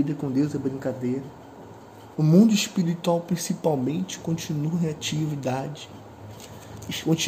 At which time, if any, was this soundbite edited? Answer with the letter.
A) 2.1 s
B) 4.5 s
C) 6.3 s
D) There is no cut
A